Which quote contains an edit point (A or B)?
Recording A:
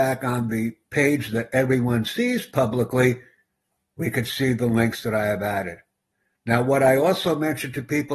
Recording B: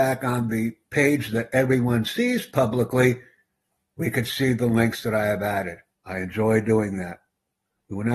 B